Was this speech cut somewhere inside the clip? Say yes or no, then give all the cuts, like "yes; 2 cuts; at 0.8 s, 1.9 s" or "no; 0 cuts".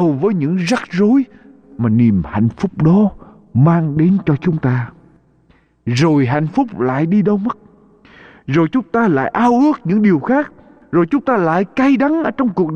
no; 0 cuts